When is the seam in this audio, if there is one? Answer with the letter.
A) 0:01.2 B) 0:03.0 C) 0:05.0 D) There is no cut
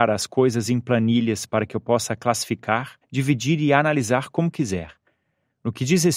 B